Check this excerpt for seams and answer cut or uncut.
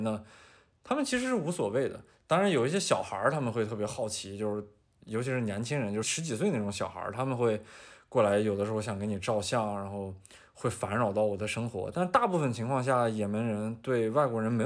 cut